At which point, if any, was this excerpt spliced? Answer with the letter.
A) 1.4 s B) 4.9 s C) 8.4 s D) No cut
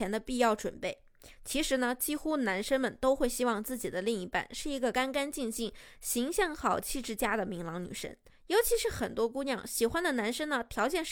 D